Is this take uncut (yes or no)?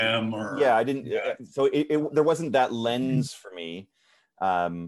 yes